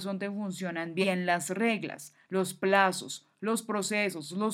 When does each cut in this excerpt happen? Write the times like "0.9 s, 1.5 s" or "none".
none